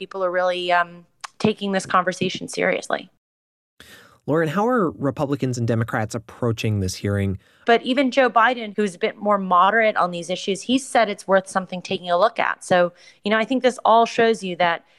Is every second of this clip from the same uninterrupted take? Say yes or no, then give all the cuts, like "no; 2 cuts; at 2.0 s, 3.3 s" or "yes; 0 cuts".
no; 1 cut; at 7.6 s